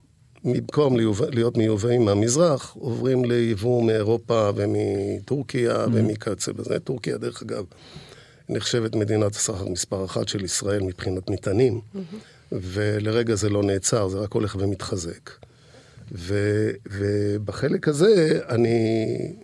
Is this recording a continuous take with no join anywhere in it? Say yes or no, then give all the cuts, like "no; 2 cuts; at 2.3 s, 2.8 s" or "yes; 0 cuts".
yes; 0 cuts